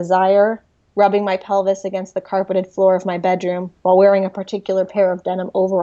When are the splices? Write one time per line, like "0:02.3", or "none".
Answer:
0:00.9
0:03.8